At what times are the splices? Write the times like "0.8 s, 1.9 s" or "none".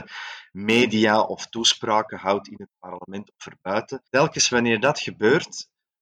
4.1 s